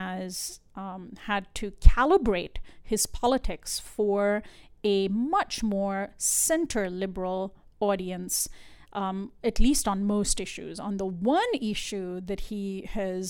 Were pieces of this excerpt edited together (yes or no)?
no